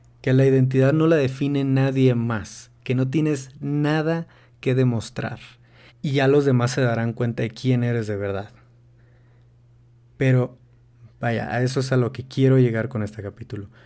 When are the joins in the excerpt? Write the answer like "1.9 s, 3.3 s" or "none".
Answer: 5.9 s